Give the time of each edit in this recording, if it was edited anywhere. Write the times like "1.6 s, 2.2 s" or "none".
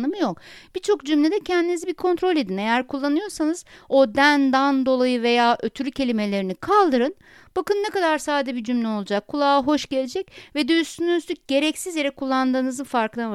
none